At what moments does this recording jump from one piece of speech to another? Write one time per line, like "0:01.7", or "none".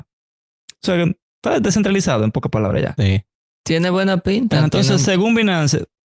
none

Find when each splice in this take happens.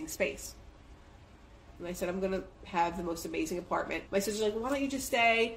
0:01.8
0:04.1

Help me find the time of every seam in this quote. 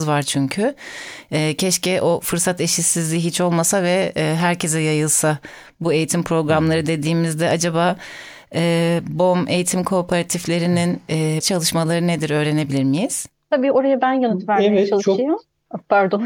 0:11.4

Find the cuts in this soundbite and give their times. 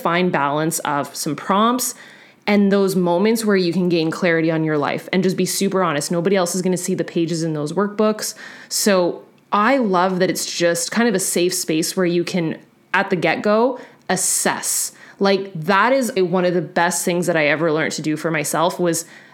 0:16.2

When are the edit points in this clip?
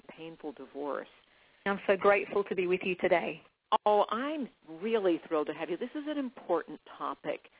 0:01.7

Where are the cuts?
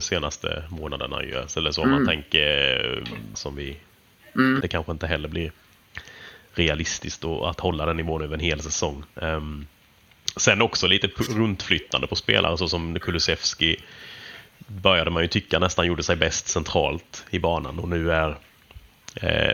0:03.3
0:04.6
0:09.1

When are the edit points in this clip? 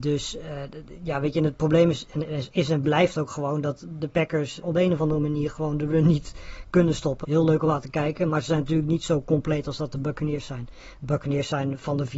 0:04.6
0:07.2

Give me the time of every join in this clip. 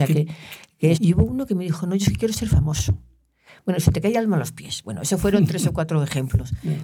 0:00.9

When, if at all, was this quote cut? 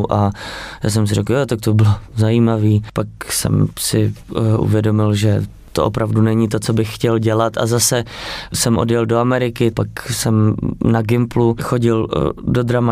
0:09.7

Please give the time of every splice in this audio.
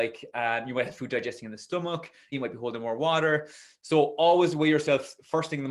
0:02.3

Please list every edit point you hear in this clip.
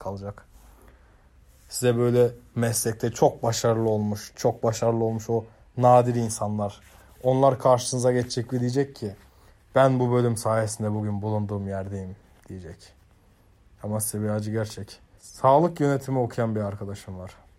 0:04.3
0:15.2

